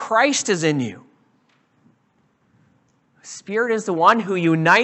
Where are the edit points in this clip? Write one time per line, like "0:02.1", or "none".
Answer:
none